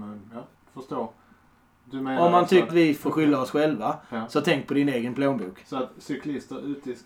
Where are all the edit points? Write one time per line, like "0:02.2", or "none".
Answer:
0:02.7